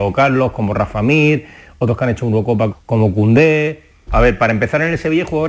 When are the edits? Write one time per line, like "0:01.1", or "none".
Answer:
0:02.7
0:04.1